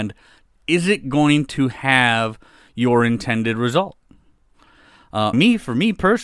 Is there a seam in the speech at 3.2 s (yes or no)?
no